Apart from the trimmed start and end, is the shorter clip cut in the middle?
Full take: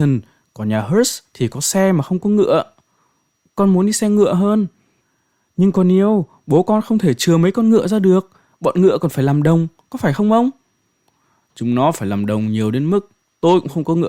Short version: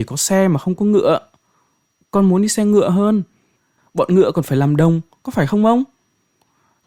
yes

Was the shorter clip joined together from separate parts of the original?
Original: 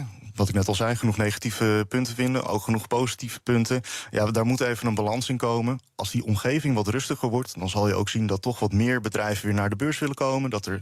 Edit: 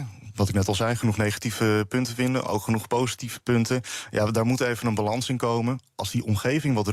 no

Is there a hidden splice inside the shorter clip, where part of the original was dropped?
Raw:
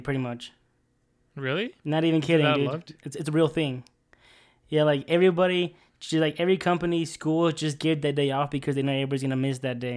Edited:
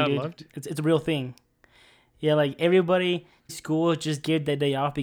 yes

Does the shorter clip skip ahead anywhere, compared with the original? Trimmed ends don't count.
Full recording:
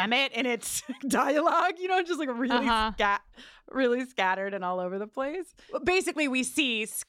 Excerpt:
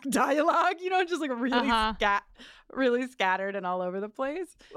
no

